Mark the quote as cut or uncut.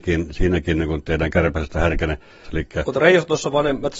cut